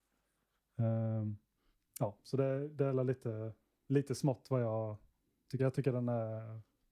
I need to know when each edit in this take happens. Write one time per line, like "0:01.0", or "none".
none